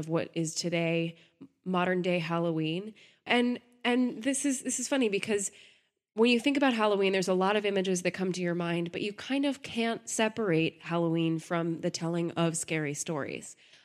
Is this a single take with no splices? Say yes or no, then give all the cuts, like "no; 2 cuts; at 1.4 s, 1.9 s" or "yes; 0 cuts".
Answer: no; 1 cut; at 3.3 s